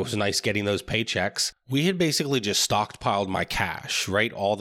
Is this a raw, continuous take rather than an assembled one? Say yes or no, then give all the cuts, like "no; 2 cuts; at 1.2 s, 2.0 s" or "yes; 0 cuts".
yes; 0 cuts